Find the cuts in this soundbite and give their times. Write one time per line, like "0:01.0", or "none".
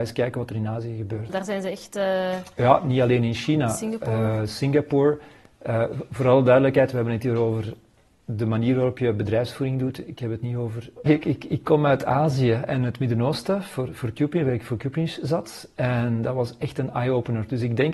0:01.3
0:11.1